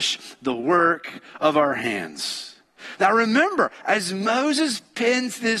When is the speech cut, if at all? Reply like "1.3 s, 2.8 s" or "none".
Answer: 3.0 s